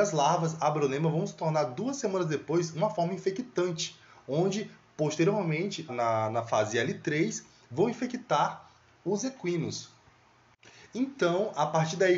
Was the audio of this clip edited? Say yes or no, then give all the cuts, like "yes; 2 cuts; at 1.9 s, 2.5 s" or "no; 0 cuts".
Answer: yes; 1 cut; at 5.9 s